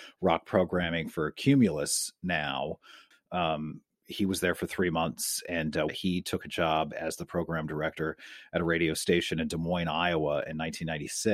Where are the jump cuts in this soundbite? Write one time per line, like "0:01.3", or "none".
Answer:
0:03.1
0:05.9